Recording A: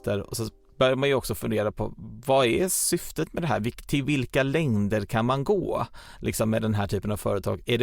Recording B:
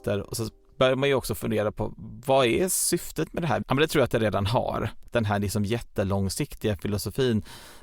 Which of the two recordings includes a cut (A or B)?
B